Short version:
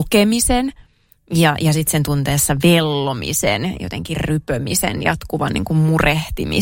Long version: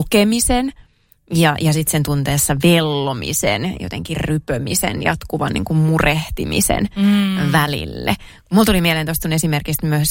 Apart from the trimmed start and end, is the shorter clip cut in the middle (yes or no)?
no